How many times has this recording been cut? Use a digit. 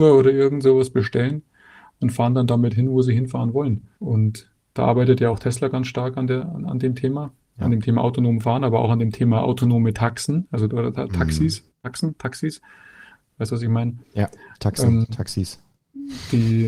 1